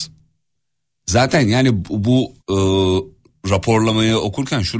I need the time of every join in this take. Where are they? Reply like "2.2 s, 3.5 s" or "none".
1.0 s, 2.4 s